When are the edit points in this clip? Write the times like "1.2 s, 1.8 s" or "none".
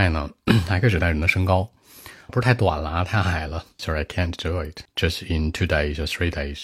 2.3 s, 3.8 s, 4.9 s